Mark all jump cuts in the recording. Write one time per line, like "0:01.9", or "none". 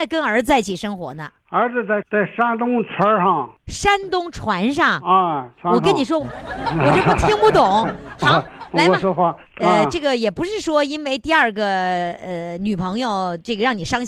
0:06.2
0:09.4